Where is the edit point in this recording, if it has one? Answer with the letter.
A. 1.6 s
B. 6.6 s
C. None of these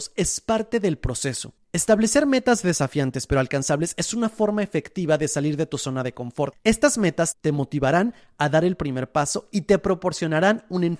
A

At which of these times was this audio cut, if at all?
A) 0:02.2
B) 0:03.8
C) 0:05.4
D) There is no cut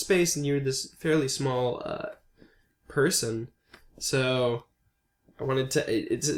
D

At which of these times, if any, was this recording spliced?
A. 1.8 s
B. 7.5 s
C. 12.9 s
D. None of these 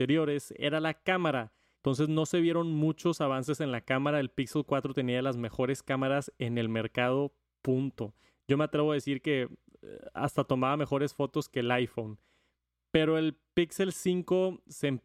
A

